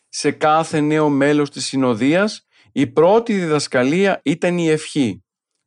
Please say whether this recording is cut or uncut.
uncut